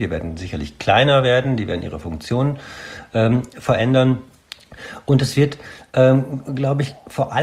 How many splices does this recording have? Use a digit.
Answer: 0